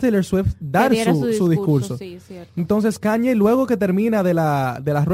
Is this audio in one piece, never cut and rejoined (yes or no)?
yes